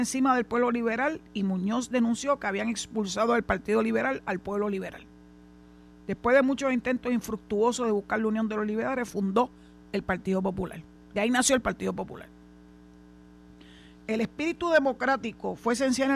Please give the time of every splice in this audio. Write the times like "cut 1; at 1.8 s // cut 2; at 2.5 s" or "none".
none